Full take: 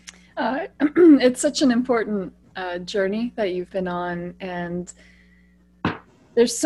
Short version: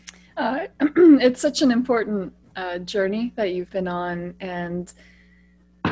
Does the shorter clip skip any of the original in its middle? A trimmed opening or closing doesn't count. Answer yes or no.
no